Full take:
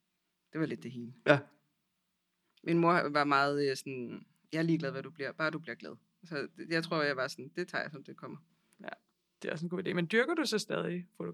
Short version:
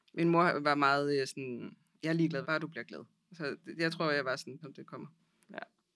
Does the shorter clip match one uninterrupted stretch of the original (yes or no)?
no